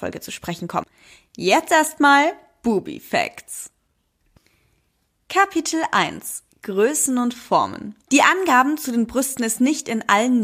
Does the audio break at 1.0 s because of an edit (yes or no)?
no